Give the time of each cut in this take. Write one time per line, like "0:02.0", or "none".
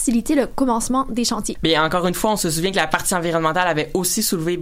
0:01.5